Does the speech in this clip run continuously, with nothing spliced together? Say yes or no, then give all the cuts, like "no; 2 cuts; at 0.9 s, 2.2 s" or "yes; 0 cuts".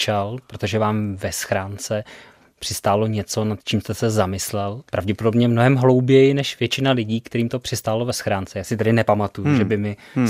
no; 1 cut; at 4.9 s